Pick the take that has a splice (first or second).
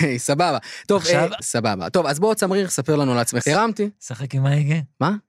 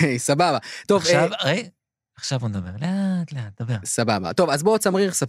first